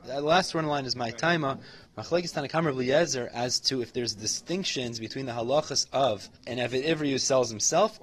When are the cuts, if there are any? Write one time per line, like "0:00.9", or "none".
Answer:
0:01.9
0:06.4